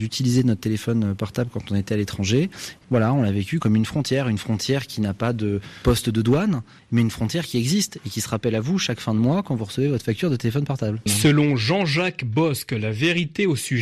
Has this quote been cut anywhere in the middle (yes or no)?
yes